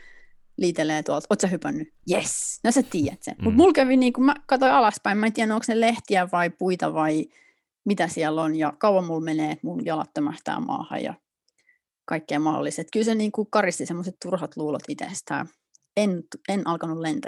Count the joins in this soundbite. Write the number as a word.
one